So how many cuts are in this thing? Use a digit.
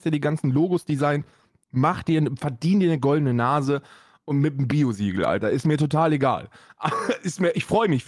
0